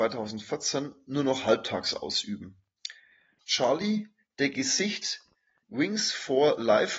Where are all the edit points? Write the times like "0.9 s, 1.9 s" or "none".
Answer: 3.4 s, 5.6 s